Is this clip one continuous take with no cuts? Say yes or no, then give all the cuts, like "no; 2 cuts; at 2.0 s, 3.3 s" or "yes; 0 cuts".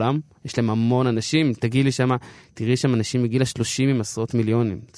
yes; 0 cuts